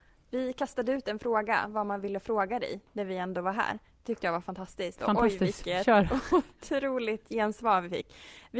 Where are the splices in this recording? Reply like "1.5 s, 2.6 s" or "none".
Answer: none